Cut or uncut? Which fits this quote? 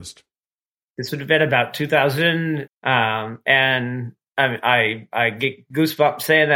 cut